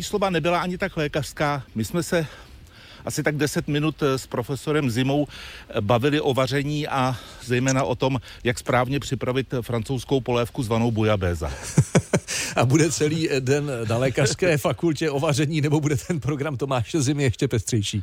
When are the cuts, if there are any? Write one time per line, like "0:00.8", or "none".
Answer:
none